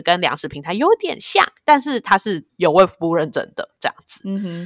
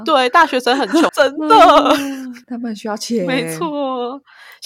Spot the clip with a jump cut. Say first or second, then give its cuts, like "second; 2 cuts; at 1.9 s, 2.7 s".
second; 2 cuts; at 1.1 s, 2.4 s